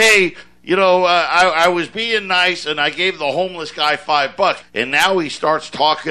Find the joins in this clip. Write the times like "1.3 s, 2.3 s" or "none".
4.6 s